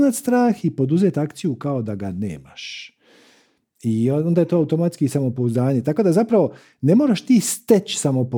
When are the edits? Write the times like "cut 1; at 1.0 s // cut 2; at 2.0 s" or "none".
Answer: none